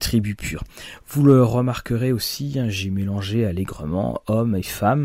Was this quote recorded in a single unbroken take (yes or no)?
yes